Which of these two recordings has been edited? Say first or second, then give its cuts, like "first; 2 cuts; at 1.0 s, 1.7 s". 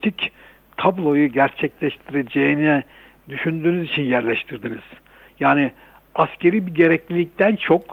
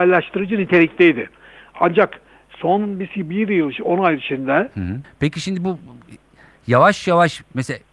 second; 1 cut; at 5.0 s